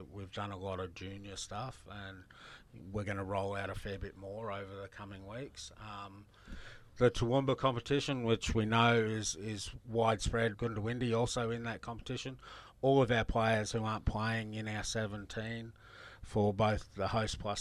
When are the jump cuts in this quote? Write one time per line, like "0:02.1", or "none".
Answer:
0:07.0
0:10.5